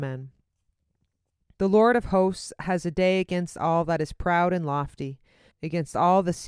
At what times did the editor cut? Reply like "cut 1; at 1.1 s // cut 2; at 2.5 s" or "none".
cut 1; at 1.5 s // cut 2; at 5.5 s